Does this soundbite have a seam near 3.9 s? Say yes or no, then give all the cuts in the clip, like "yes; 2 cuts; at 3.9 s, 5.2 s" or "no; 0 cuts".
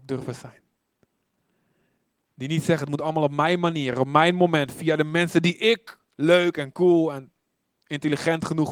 no; 0 cuts